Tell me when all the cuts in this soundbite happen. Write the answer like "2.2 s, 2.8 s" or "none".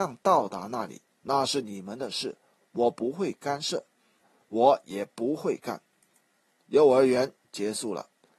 4.2 s, 6.5 s